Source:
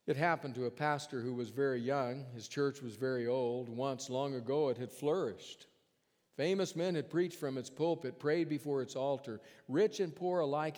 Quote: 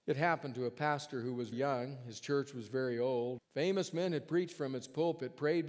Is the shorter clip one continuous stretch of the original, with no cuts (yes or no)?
no